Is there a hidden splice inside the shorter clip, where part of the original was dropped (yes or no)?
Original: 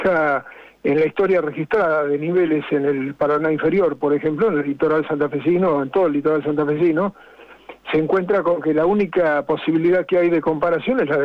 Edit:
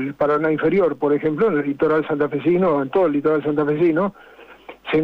no